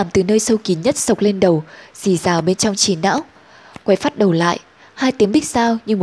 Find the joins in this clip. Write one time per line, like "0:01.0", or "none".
none